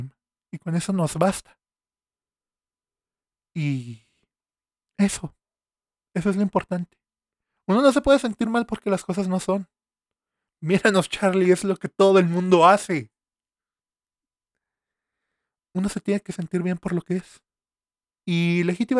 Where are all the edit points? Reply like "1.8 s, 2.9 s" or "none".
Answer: none